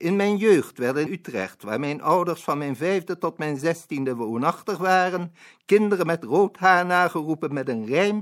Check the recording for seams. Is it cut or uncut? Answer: cut